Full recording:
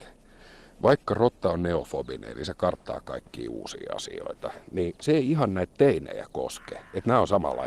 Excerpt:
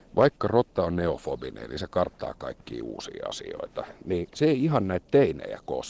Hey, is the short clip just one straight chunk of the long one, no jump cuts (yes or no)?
yes